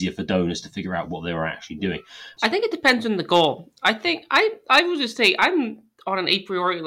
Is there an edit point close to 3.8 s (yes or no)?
no